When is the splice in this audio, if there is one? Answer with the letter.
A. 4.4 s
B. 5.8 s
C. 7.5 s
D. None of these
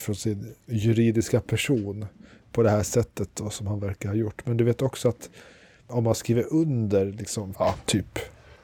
C